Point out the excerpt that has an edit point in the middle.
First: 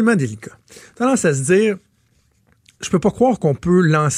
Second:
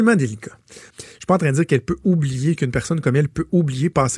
second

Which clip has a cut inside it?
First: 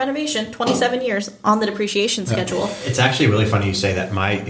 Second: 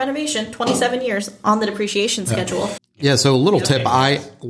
second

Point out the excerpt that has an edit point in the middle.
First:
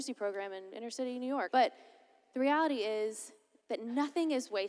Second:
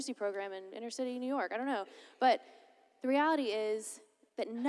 first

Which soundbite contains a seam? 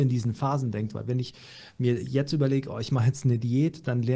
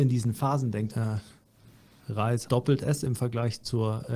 second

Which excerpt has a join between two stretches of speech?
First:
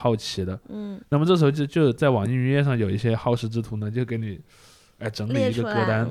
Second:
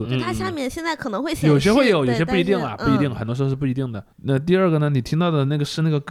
second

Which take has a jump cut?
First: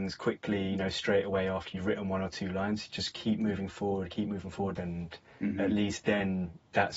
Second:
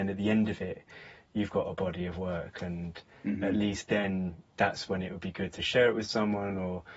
first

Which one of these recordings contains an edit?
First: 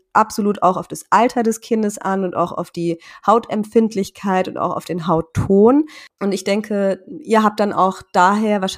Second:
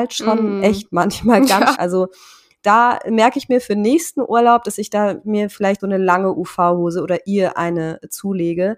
second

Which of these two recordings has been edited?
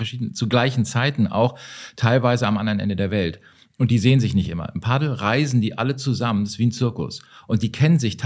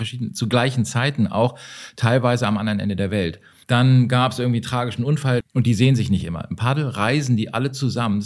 second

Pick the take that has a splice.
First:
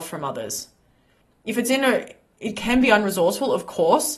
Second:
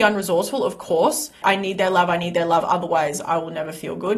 second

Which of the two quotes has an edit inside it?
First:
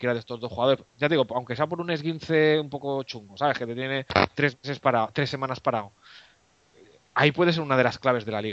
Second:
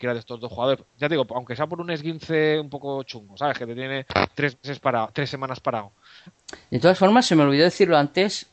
second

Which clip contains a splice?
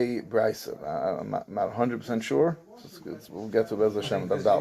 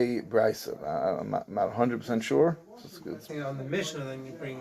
second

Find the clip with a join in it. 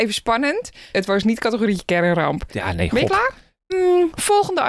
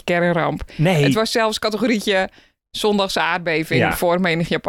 first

